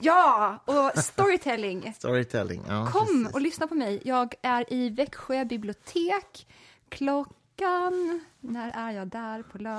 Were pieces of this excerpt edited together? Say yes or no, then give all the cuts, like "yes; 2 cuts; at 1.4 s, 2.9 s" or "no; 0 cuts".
no; 0 cuts